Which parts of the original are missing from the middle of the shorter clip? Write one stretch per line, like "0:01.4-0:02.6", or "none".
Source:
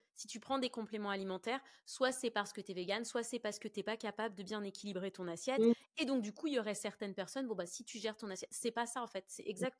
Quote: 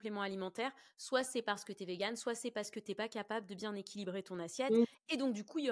none